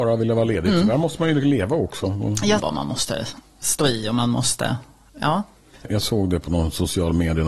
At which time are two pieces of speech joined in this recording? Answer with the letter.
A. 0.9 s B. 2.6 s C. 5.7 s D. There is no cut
B